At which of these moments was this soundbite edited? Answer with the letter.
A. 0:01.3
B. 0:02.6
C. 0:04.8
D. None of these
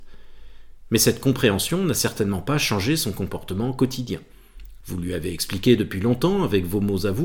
C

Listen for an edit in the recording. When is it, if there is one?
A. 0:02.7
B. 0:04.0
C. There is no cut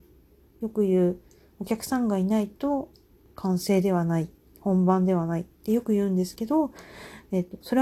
C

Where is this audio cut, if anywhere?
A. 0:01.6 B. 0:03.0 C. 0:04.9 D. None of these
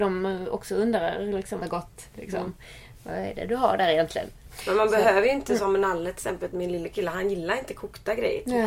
A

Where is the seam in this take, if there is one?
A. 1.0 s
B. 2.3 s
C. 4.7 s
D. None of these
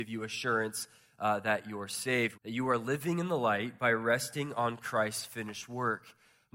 B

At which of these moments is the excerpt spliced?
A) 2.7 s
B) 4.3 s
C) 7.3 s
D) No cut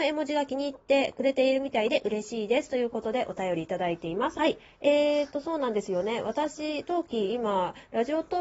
B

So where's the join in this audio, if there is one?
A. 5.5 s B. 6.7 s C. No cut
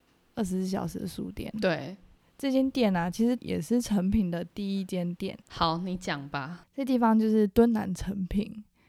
A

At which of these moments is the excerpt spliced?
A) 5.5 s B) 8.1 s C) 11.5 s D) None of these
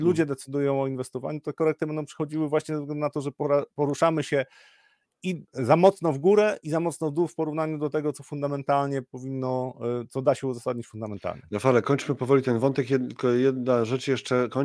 A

